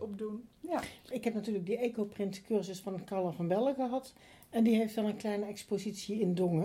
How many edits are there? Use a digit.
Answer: 1